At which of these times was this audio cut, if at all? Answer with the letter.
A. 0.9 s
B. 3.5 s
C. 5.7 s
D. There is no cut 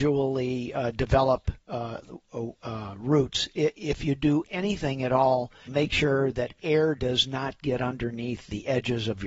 C